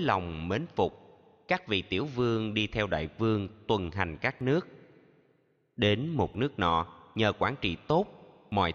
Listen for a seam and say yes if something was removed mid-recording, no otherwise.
no